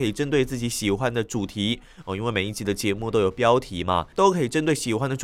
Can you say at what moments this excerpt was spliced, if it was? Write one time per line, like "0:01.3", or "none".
0:04.1